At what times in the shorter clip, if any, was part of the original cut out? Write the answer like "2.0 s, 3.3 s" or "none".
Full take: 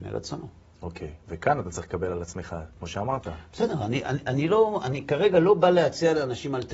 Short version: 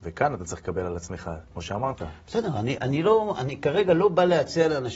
2.8 s

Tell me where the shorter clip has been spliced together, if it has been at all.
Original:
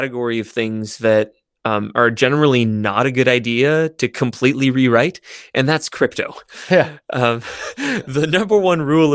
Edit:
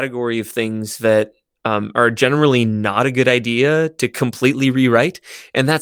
none

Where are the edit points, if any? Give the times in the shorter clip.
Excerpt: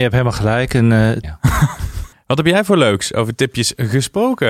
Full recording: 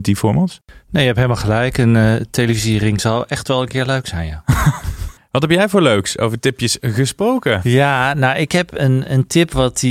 1.2 s

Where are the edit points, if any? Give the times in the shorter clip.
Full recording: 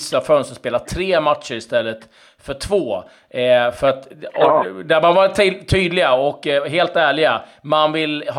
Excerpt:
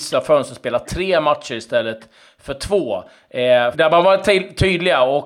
3.7 s

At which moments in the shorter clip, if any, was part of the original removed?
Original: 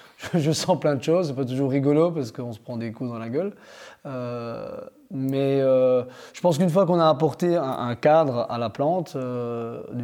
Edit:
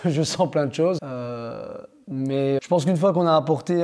1.0 s, 2.6 s

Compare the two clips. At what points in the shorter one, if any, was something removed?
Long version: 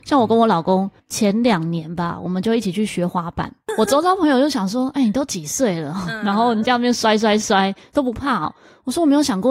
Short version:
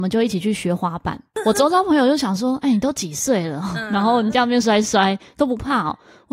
4.6 s

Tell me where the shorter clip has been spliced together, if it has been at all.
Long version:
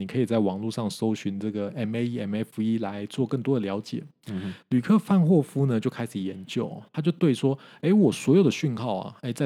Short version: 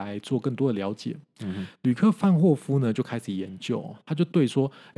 none

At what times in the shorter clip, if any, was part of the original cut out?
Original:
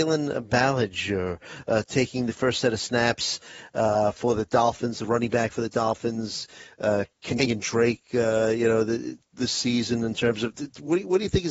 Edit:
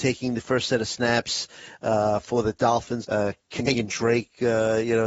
3.0 s

